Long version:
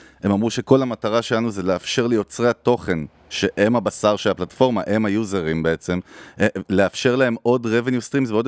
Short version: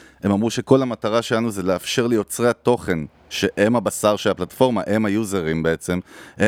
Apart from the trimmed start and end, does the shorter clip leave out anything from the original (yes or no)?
no